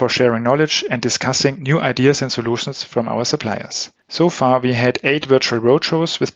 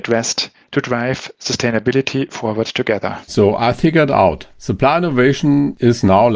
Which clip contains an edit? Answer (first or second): second